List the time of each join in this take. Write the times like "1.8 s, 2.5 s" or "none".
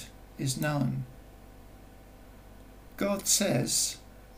2.9 s